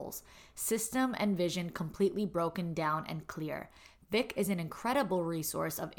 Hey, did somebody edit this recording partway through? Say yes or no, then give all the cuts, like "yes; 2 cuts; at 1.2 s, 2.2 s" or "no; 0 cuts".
no; 0 cuts